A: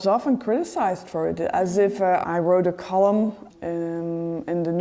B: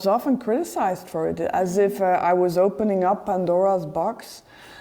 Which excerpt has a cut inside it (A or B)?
A